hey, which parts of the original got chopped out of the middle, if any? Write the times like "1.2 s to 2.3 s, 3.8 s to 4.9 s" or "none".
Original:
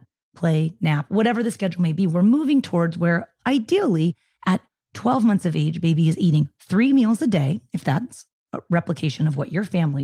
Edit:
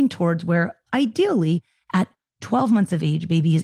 none